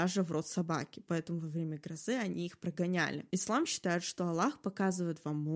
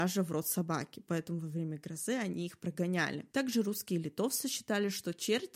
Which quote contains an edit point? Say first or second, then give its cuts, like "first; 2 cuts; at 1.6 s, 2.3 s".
first; 1 cut; at 3.3 s